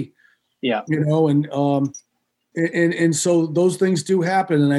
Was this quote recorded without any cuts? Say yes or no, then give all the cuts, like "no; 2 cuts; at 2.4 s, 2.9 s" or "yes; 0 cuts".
yes; 0 cuts